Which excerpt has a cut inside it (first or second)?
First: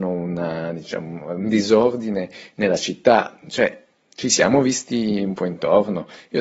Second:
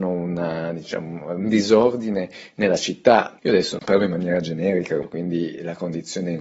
second